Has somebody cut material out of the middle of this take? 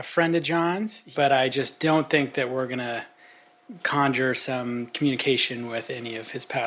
no; 0 cuts

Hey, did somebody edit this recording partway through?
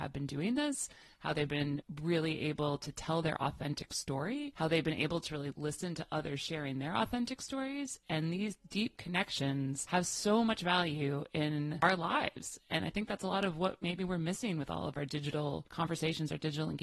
no; 0 cuts

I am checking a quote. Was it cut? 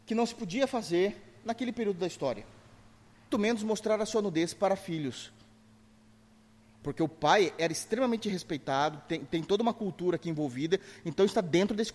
yes; 1 cut; at 3.3 s

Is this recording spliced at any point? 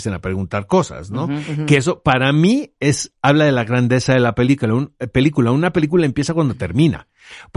no; 0 cuts

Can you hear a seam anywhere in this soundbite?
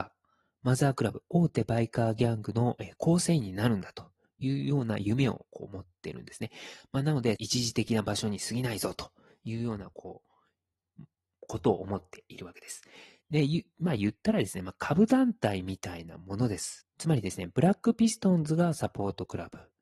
yes; 3 cuts; at 7.4 s, 13.2 s, 16.8 s

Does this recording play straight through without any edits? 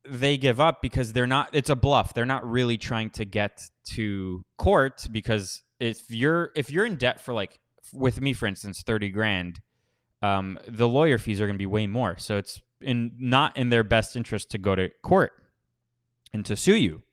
yes; 0 cuts

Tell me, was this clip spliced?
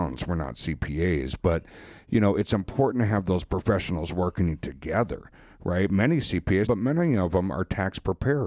yes; 1 cut; at 6.7 s

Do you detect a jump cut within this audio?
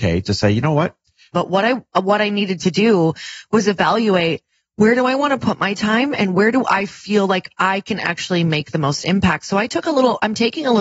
yes; 1 cut; at 1.3 s

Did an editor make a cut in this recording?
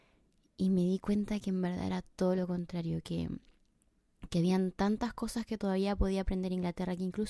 no; 0 cuts

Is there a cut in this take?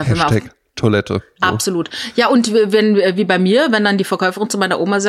no; 0 cuts

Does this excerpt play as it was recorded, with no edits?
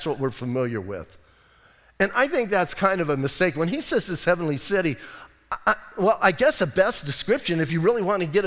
yes; 0 cuts

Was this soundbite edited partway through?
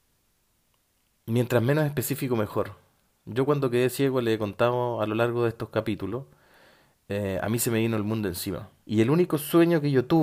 yes; 1 cut; at 8.8 s

